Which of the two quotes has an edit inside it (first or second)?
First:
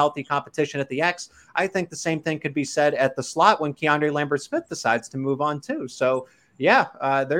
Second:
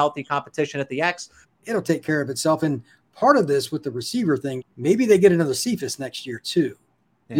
second